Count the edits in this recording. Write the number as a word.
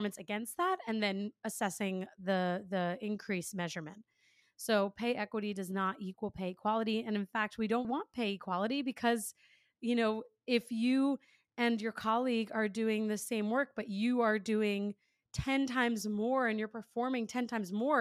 two